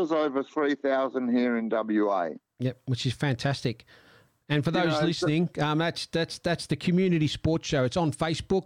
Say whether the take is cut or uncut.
uncut